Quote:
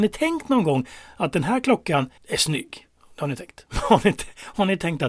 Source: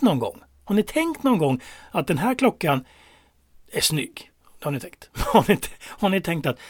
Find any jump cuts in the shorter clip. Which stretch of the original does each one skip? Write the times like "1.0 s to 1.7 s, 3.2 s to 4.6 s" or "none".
2.9 s to 3.6 s